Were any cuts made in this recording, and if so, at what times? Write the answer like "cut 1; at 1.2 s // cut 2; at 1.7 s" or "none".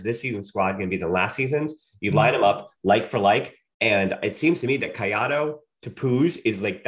none